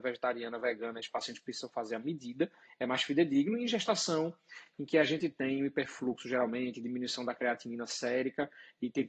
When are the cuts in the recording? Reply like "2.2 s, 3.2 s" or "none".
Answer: none